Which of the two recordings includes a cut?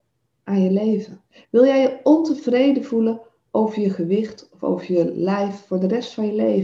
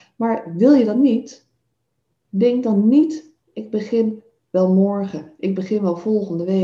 first; 1 cut; at 1.4 s

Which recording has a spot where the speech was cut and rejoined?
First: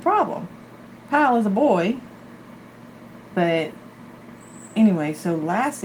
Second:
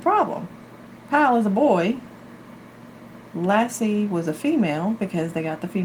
first; 1 cut; at 3.3 s

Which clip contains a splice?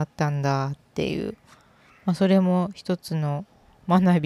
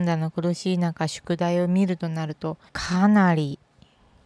second; 1 cut; at 2.7 s

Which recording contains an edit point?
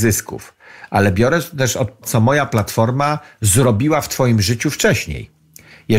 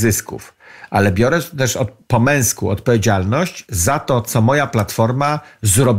first; 1 cut; at 2.0 s

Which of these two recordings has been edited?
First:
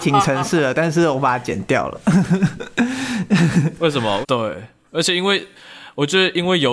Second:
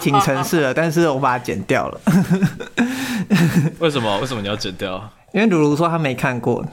first; 1 cut; at 4.2 s

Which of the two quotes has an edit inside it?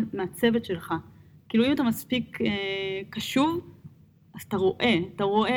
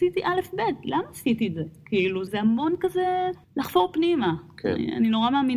second; 2 cuts; at 2.3 s, 3.4 s

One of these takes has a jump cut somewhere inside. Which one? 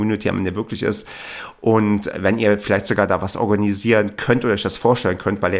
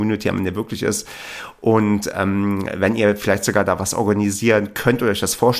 first; 1 cut; at 2.1 s

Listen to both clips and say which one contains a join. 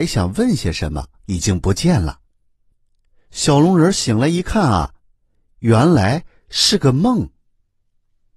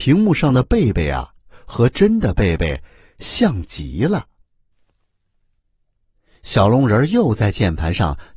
first; 1 cut; at 1.2 s

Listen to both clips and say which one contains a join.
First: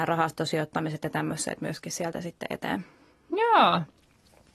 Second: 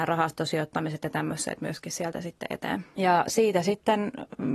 second; 1 cut; at 3.0 s

